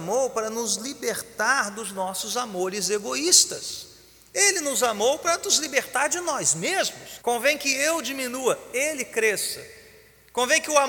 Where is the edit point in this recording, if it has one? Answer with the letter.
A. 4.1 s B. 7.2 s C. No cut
B